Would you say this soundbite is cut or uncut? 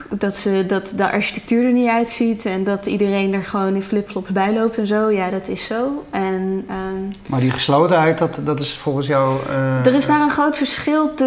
uncut